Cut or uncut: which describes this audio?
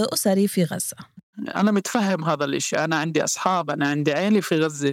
uncut